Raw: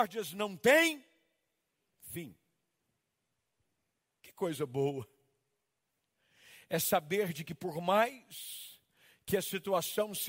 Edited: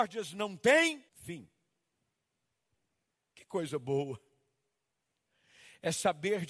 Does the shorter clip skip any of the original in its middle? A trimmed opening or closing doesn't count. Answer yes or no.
yes